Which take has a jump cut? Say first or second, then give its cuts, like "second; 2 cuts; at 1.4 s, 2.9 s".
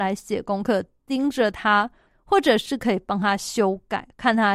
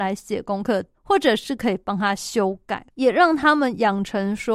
second; 2 cuts; at 0.9 s, 2.9 s